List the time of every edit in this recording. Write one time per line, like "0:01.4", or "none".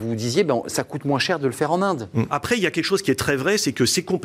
0:02.3

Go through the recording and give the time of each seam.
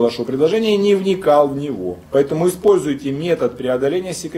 0:02.1

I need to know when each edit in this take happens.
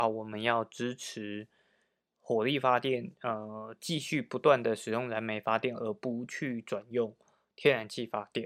none

